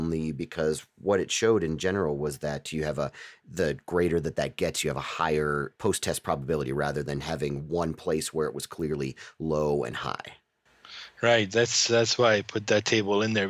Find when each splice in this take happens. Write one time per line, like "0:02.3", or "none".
none

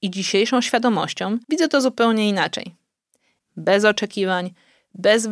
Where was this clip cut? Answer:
0:01.4
0:03.4

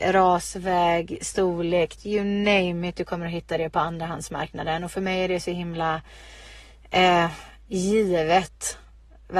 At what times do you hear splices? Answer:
0:02.0

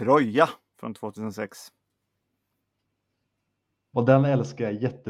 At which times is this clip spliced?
0:03.9

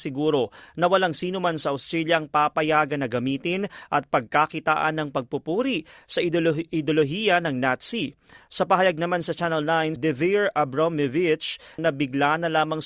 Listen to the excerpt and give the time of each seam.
0:10.0
0:11.8

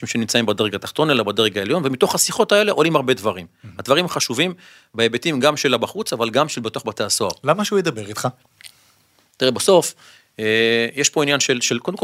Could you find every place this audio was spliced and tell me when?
none

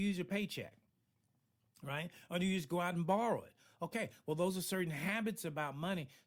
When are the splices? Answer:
none

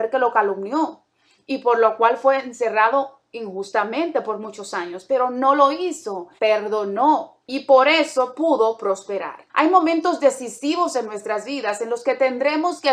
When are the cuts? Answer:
0:06.4
0:07.4
0:09.5

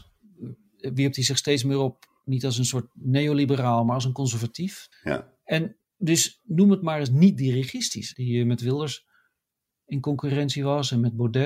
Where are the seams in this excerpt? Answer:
0:04.9
0:08.1

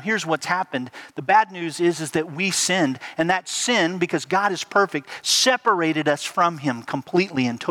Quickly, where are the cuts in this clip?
none

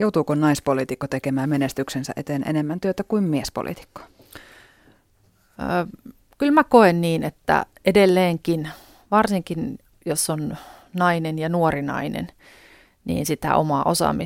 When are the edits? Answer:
none

